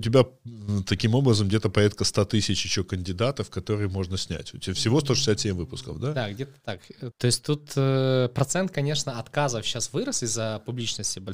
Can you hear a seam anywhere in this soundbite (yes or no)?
yes